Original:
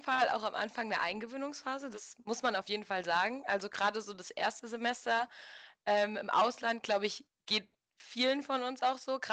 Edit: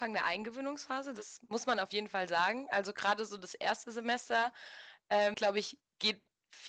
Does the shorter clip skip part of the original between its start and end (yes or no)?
yes